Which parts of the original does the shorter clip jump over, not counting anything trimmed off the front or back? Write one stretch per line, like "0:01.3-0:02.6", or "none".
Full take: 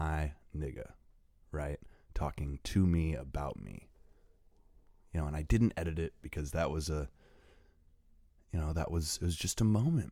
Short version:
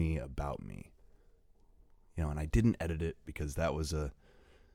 none